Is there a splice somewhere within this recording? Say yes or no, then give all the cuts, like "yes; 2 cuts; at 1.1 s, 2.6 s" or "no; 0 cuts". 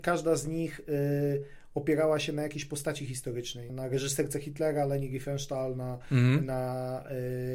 yes; 1 cut; at 3.7 s